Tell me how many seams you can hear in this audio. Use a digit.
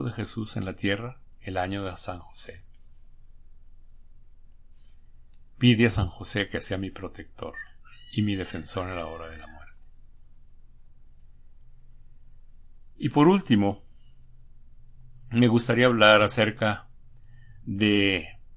1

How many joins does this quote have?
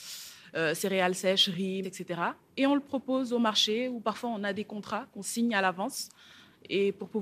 1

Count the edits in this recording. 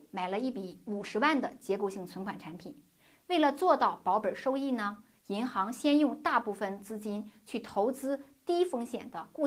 0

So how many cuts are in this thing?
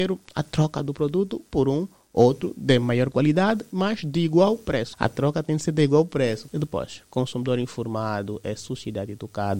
2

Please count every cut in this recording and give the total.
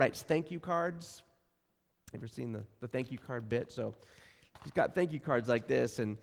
0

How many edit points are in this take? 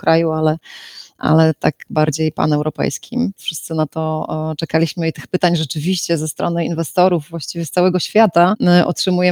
1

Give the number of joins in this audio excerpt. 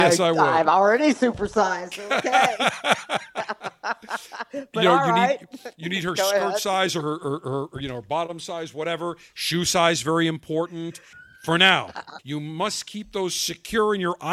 2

